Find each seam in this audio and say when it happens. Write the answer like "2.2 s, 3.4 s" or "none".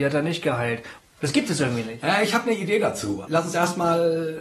1.0 s, 3.3 s